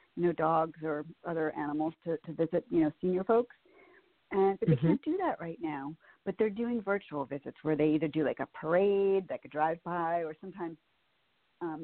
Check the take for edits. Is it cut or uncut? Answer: uncut